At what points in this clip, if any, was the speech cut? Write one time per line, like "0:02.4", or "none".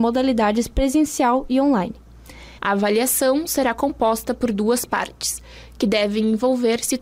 0:02.6